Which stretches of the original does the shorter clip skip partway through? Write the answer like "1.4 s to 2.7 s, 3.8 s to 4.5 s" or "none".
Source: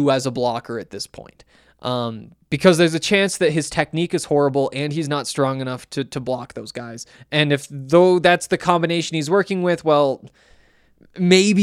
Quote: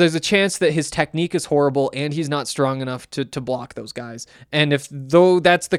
none